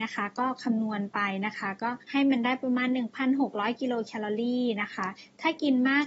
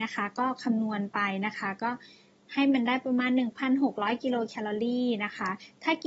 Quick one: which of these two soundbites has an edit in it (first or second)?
first